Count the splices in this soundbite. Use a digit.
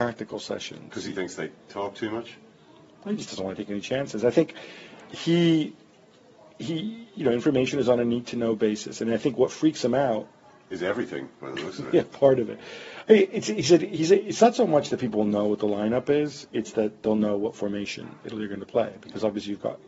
0